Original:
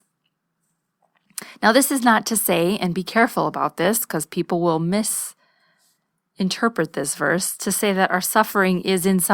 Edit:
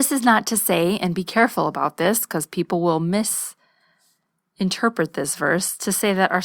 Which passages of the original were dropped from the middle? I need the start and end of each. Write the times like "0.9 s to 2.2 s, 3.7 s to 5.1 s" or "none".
none